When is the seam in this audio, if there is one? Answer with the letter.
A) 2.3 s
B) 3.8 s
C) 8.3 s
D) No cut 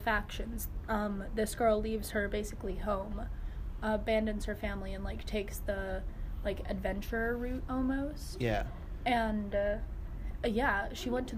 D